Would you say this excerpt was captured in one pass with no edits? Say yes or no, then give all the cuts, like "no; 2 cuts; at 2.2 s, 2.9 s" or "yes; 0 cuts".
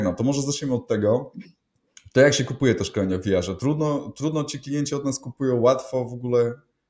yes; 0 cuts